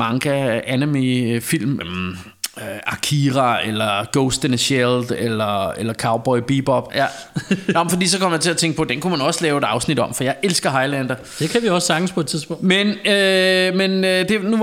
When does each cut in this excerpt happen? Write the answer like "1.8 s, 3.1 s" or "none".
1.8 s, 6.9 s